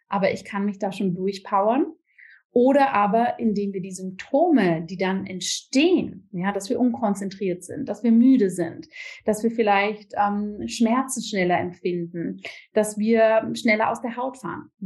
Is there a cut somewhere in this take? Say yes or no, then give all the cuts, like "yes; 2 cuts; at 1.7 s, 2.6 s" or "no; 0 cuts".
no; 0 cuts